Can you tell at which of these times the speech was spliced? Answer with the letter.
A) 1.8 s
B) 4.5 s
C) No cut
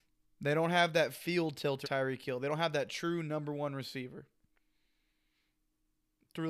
A